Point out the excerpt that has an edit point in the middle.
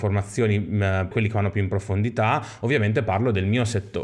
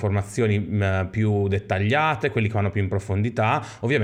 first; 1 cut; at 1.1 s

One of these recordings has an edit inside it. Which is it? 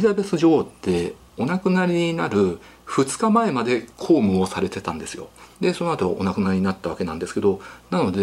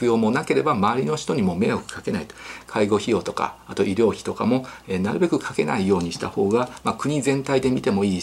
first; 1 cut; at 5.5 s

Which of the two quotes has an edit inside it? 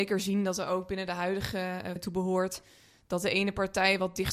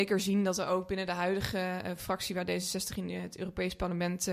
first; 1 cut; at 2.0 s

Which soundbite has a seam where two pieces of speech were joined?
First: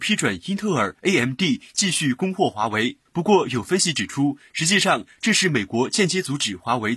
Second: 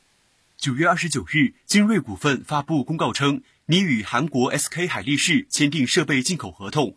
first; 1 cut; at 3.1 s

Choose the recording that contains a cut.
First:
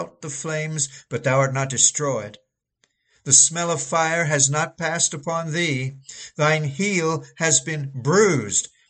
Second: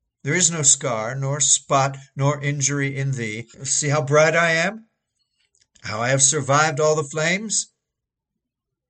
second; 1 cut; at 3.5 s

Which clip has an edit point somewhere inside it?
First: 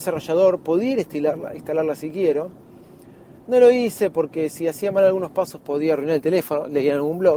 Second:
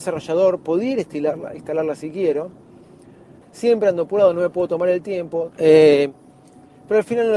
second; 2 cuts; at 3.4 s, 5.5 s

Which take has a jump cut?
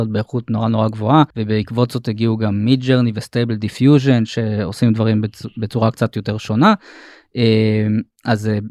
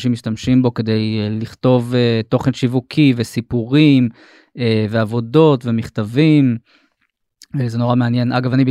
first; 1 cut; at 1.3 s

